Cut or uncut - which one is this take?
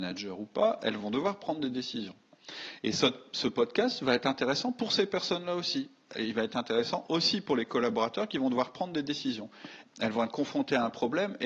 cut